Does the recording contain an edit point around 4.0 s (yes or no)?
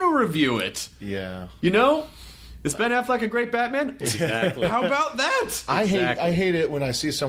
yes